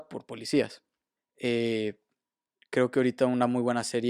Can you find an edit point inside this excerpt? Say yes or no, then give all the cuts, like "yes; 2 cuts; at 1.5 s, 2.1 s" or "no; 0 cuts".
yes; 1 cut; at 1.2 s